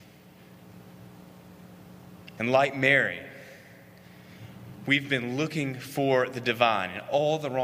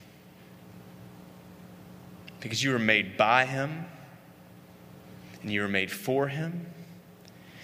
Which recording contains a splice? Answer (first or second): first